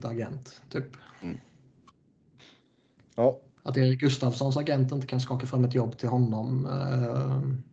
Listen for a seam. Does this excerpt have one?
no; 0 cuts

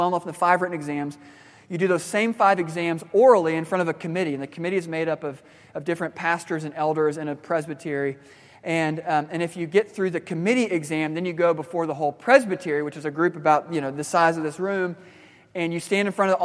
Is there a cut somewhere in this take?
no; 0 cuts

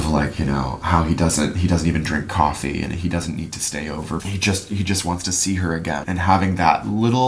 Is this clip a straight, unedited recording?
no; 2 cuts; at 4.2 s, 6.0 s

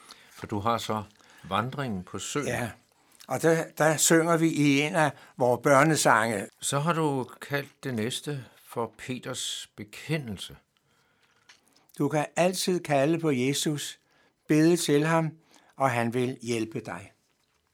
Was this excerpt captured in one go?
no; 2 cuts; at 6.5 s, 11.8 s

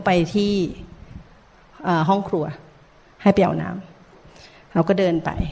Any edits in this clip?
no; 0 cuts

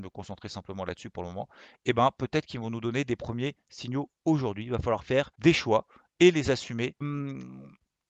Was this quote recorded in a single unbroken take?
no; 2 cuts; at 5.3 s, 7.0 s

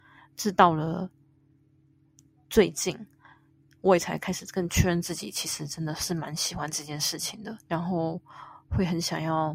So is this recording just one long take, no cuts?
yes; 0 cuts

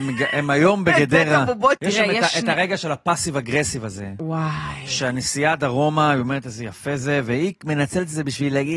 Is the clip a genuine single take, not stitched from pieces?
no; 1 cut; at 1.7 s

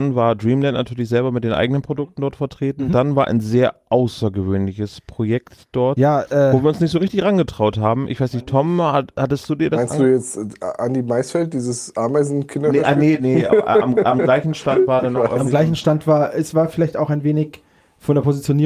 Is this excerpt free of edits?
yes; 0 cuts

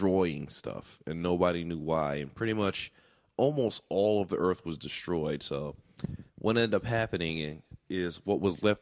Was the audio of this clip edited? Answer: no; 0 cuts

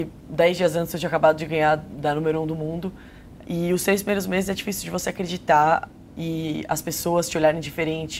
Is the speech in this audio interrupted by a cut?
yes; 2 cuts; at 3.4 s, 6.1 s

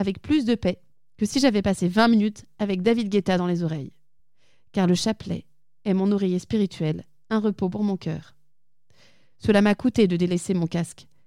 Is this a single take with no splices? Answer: yes; 0 cuts

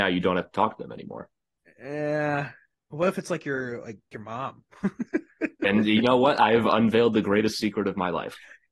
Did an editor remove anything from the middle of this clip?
yes; 1 cut; at 4.1 s

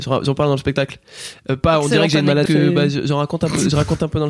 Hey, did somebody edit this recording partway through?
yes; 1 cut; at 2.5 s

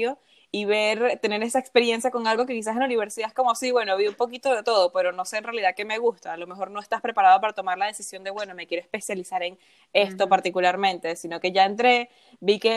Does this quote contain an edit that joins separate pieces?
no; 0 cuts

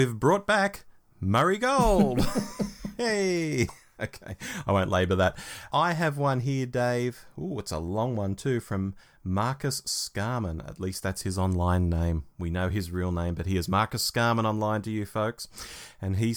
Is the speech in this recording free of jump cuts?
yes; 0 cuts

